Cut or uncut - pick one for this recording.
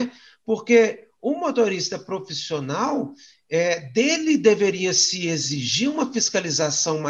uncut